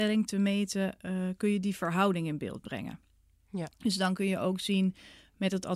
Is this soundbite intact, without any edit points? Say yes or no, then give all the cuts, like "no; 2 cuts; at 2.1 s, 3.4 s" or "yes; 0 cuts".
yes; 0 cuts